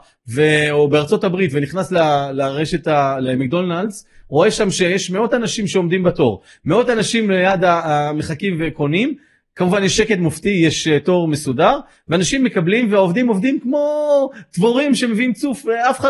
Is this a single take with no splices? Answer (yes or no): yes